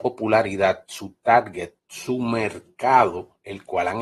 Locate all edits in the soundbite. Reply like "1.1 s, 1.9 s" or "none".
1.8 s